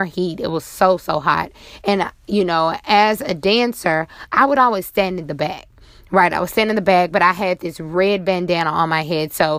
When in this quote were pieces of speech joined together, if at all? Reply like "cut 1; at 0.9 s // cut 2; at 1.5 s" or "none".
none